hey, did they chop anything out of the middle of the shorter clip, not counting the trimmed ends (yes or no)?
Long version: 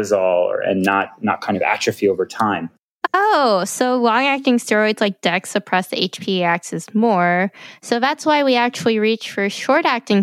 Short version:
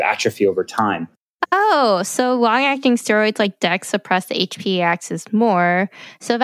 no